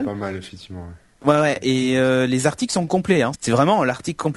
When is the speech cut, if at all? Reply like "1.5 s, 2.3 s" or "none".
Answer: 3.3 s